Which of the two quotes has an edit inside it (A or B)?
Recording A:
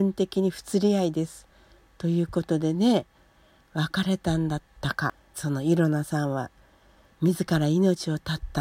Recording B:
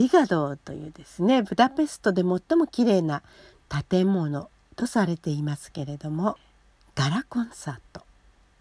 A